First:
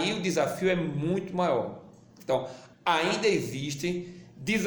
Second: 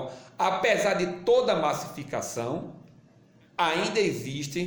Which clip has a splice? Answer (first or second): first